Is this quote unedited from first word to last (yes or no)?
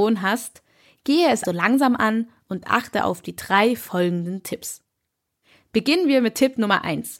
no